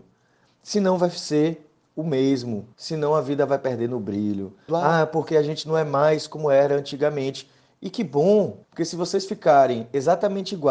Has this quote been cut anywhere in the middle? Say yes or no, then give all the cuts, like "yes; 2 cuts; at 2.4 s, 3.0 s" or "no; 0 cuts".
yes; 3 cuts; at 2.7 s, 4.7 s, 8.6 s